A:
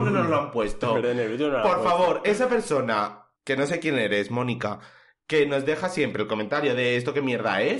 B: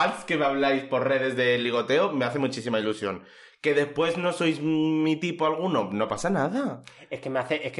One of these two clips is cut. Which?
A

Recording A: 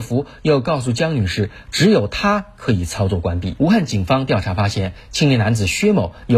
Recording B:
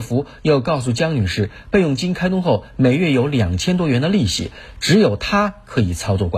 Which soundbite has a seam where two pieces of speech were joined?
A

